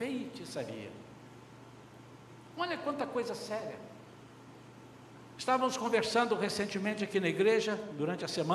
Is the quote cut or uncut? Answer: uncut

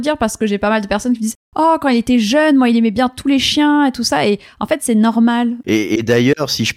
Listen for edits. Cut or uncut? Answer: uncut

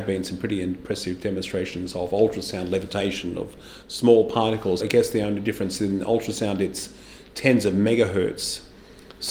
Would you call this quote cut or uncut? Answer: cut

